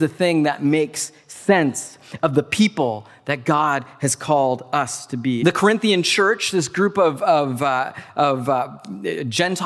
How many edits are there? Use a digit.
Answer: 1